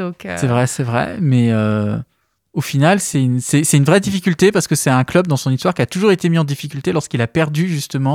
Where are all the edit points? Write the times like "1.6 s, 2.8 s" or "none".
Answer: none

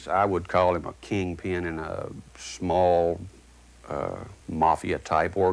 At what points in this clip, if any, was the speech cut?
4.4 s

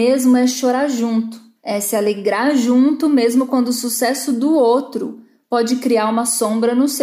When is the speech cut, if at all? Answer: 1.6 s

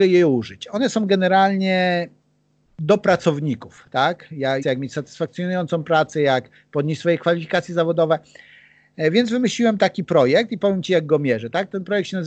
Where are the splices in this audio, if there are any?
4.6 s

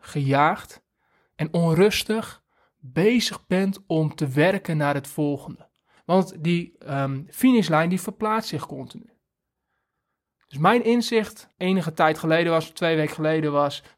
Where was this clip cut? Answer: 6.0 s, 11.5 s

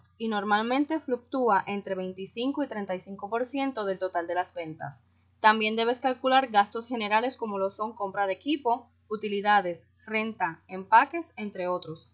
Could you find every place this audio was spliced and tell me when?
none

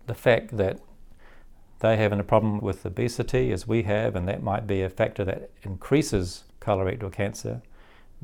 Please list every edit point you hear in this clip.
2.6 s, 6.5 s

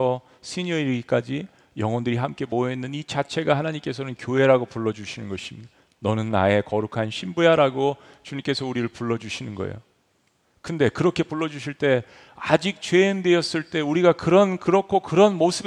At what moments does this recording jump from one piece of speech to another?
none

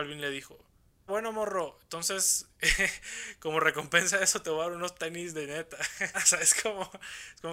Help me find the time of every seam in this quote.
1.1 s, 6.1 s

